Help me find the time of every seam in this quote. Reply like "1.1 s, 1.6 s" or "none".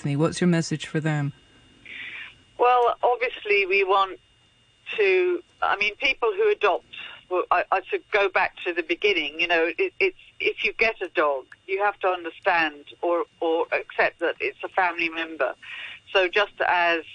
none